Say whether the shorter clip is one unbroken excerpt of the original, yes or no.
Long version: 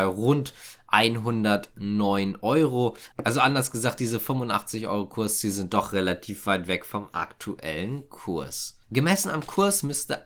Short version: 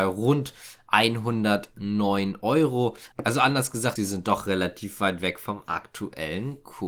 no